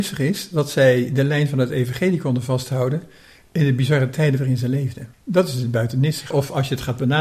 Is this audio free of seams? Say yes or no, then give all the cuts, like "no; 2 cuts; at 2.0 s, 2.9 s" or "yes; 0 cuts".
no; 2 cuts; at 5.1 s, 6.3 s